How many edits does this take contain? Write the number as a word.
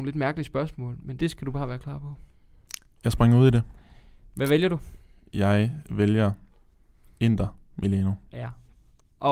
two